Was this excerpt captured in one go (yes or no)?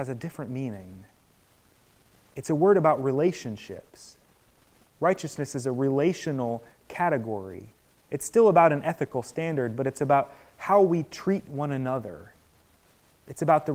yes